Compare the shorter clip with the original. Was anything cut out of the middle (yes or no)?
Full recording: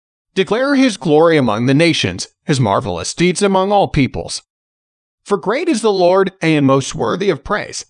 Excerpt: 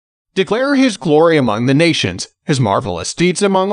no